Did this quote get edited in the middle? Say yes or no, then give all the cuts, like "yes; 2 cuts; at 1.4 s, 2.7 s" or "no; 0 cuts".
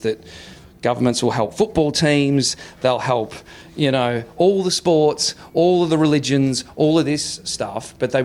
no; 0 cuts